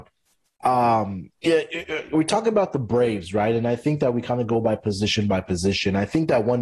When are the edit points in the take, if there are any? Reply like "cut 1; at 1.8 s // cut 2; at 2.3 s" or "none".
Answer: cut 1; at 1.4 s